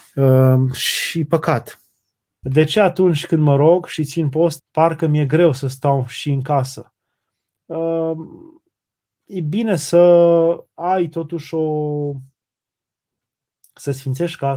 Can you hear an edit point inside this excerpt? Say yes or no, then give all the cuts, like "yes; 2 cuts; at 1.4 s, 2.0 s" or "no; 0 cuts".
yes; 2 cuts; at 2.4 s, 4.6 s